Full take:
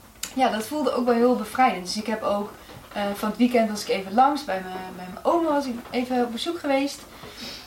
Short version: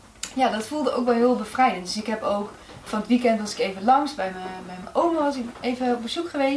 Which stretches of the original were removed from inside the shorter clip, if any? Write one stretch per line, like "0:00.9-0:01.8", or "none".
0:02.9-0:03.2